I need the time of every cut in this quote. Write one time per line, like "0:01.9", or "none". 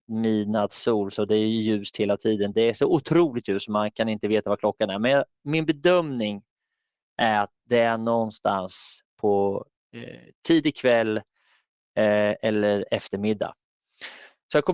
none